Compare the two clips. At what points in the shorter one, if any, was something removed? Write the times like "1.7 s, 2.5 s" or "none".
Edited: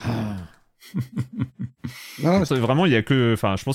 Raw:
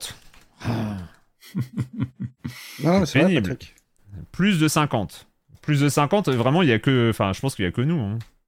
2.5 s